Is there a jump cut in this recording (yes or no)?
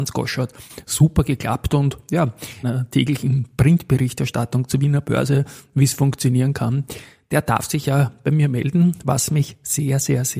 yes